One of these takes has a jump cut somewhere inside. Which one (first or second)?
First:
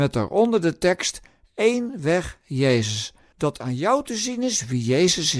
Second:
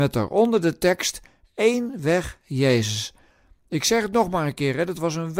first